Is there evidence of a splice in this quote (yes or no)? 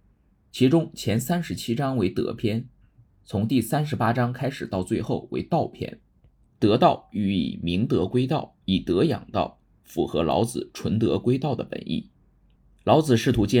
yes